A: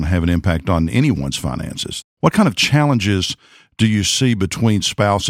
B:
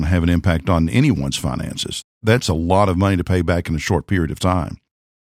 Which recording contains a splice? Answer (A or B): A